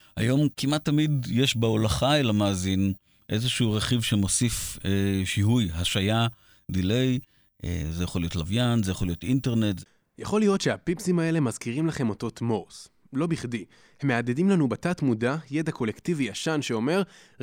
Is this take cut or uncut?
uncut